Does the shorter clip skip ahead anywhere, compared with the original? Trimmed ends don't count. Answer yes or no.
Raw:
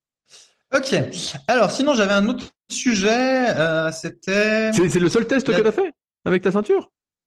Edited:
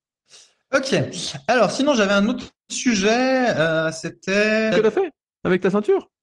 yes